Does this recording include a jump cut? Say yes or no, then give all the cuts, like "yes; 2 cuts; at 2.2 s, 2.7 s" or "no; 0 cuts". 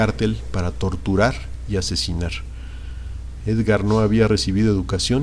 yes; 1 cut; at 3.4 s